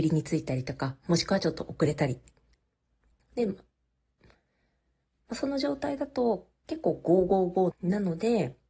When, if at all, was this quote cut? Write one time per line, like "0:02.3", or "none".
0:03.2
0:07.7